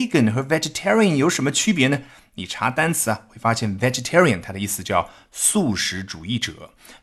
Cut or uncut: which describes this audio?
uncut